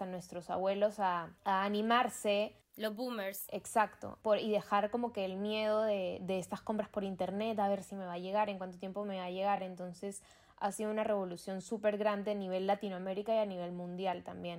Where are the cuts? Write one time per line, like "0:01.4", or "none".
none